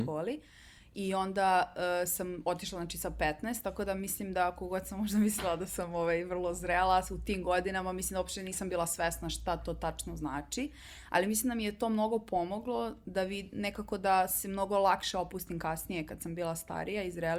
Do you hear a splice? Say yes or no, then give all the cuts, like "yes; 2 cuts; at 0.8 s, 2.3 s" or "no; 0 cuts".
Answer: no; 0 cuts